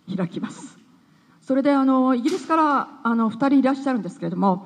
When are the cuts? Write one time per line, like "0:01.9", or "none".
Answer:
0:01.3